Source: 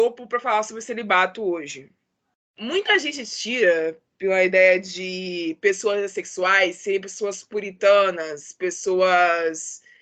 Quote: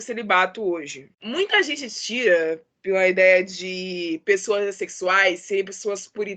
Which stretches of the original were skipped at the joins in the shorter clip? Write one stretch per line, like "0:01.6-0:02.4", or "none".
0:01.9-0:02.5